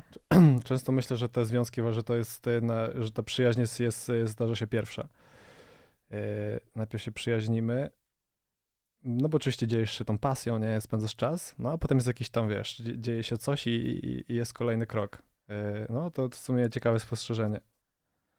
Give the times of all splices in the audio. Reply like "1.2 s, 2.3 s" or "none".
none